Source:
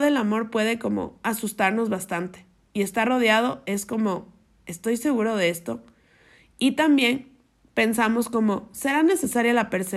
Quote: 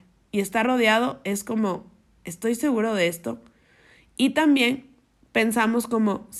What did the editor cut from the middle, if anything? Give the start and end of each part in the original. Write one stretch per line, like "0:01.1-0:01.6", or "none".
none